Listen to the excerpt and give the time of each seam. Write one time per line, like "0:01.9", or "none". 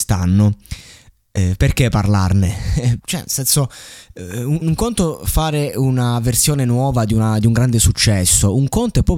0:03.0
0:04.6